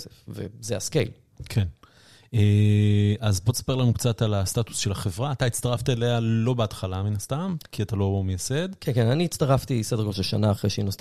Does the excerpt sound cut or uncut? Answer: uncut